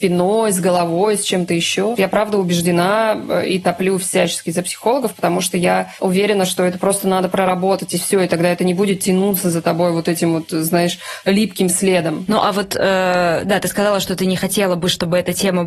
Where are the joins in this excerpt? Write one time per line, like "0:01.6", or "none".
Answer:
0:02.0

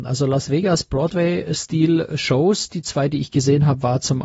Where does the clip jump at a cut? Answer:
none

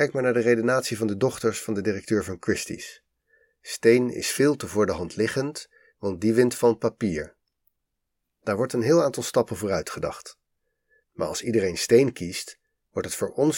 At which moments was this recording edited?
0:05.9
0:11.0

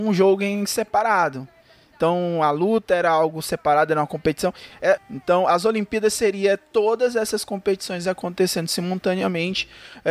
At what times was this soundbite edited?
0:05.0

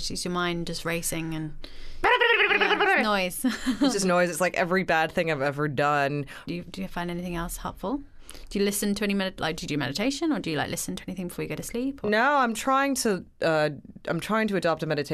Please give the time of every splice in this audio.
0:06.5

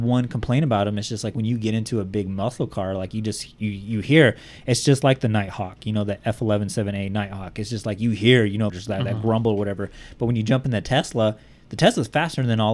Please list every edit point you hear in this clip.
0:08.7

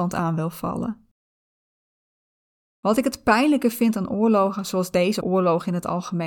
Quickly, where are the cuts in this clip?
0:05.2

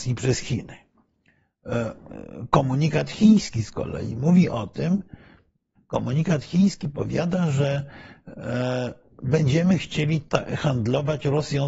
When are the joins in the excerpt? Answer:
0:05.8

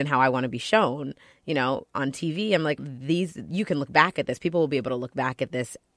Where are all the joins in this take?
0:02.8

